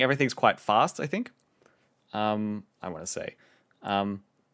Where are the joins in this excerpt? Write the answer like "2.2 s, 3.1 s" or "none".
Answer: 2.7 s